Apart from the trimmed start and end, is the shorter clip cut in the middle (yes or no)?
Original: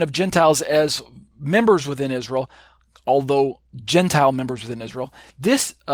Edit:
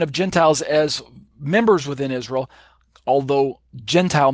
no